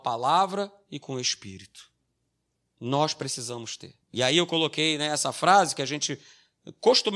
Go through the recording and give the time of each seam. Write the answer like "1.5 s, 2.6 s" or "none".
2.7 s, 4.0 s